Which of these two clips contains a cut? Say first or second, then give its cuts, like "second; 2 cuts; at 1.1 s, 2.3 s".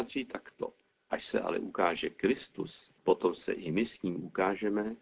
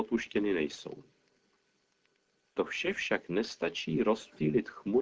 first; 2 cuts; at 0.9 s, 3.0 s